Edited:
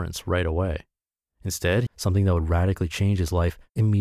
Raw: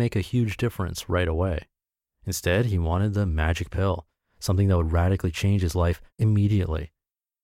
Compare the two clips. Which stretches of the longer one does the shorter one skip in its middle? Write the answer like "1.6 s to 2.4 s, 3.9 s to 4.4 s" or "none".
2.7 s to 4.3 s